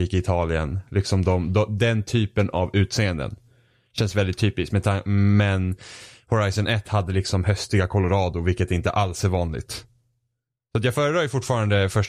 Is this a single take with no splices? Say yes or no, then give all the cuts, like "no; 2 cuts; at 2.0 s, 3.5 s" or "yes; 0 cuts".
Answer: yes; 0 cuts